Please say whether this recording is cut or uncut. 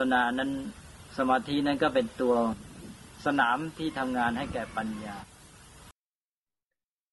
uncut